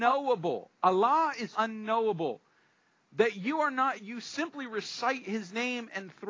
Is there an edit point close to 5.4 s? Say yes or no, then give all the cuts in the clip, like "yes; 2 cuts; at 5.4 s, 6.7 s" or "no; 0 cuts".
no; 2 cuts; at 1.5 s, 4.0 s